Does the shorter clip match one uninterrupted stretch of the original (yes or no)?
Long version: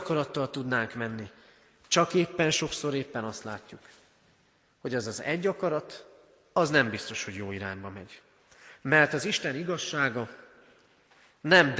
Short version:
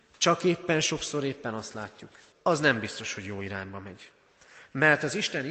no